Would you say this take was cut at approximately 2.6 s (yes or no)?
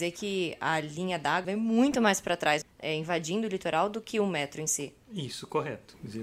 yes